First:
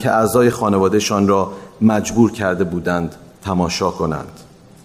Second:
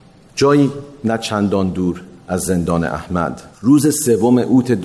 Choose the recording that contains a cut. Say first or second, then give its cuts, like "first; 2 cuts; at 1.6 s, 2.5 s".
second; 1 cut; at 3.5 s